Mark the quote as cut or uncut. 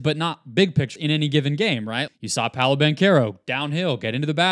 cut